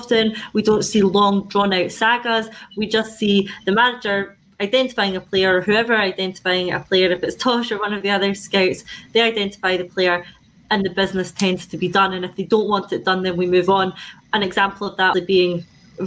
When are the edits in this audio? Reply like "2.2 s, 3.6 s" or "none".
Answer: 15.1 s